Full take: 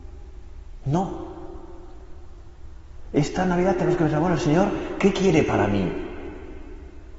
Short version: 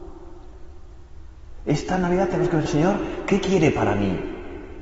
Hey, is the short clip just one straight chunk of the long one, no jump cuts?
no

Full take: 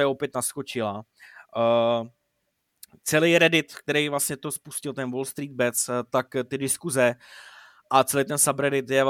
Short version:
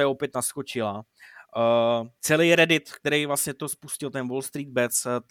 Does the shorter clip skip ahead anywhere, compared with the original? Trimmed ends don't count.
yes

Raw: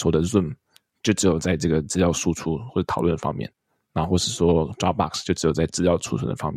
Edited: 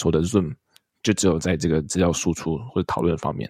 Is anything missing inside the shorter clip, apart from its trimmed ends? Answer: no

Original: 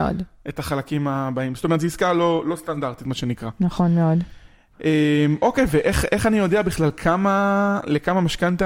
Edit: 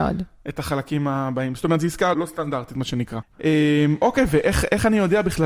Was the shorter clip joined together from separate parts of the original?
yes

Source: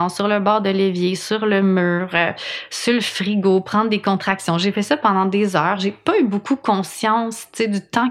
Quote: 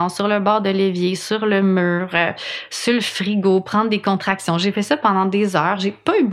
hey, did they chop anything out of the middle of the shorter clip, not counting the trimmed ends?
no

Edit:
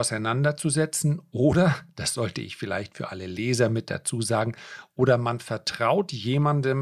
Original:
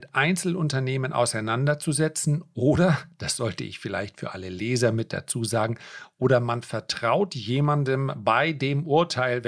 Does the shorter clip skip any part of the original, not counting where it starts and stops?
no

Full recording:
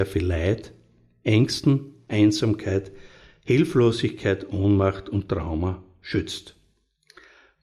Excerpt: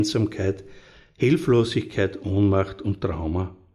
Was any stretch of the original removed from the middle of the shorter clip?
no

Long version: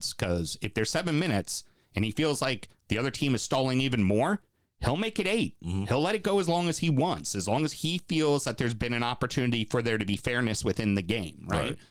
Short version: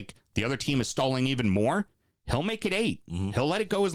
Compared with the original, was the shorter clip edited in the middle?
no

